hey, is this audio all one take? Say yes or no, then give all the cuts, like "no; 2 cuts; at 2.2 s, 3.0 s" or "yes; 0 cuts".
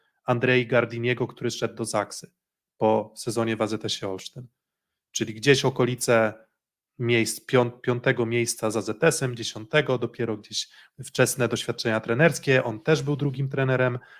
yes; 0 cuts